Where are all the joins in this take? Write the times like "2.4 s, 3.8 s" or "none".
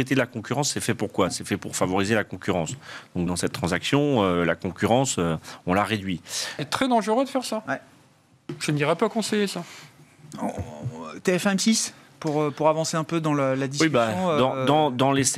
3.3 s, 6.6 s

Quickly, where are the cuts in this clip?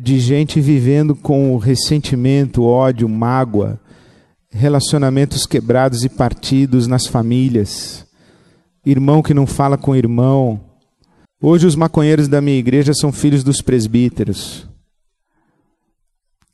11.2 s

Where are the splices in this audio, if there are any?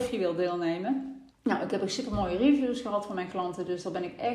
1.3 s

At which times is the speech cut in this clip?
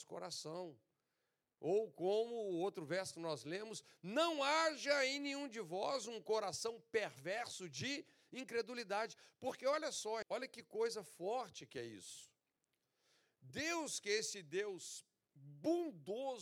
10.2 s

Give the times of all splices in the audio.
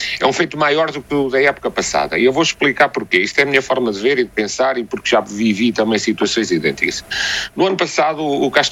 none

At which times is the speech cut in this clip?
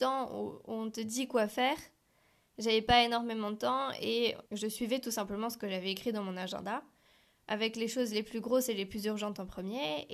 4.5 s

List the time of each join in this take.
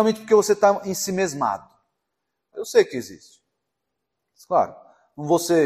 2.5 s

